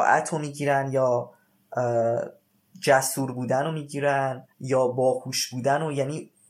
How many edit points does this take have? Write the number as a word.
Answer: one